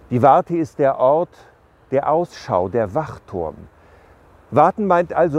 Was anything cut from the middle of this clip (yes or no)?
no